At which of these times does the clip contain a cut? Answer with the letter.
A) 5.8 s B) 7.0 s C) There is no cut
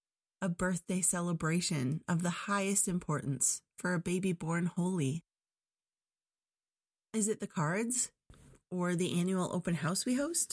C